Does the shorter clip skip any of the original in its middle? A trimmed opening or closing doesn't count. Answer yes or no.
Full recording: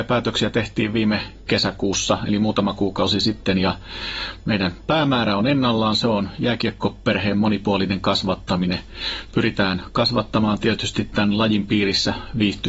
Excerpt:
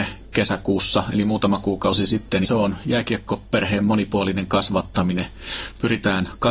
yes